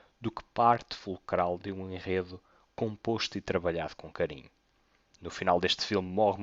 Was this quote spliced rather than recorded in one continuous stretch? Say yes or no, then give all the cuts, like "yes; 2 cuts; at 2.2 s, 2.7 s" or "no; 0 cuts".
no; 0 cuts